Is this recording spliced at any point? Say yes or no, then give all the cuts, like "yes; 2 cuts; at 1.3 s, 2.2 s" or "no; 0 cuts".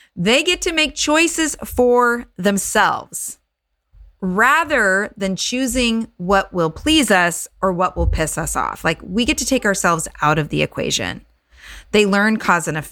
no; 0 cuts